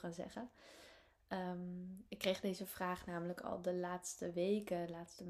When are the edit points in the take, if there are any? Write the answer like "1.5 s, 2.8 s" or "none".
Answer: none

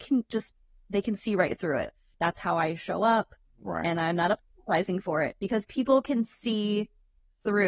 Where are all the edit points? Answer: 2.1 s

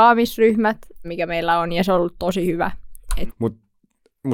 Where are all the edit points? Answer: 1.0 s, 3.3 s

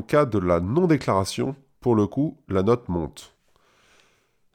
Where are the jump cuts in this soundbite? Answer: none

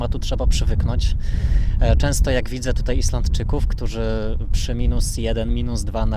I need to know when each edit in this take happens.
none

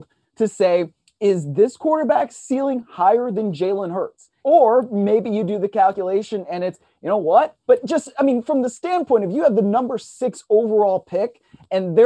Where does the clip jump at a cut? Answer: 4.4 s, 7.6 s

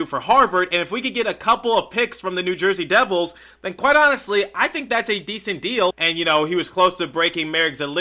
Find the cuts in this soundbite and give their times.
5.9 s

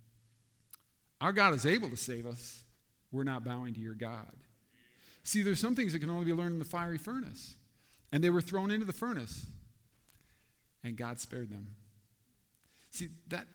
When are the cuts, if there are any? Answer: 3.0 s

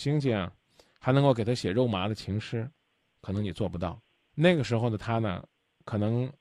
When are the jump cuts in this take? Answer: 4.3 s

